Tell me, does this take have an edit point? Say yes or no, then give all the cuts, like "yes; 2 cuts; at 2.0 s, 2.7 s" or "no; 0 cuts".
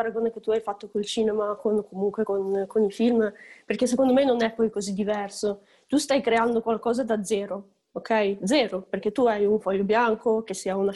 no; 0 cuts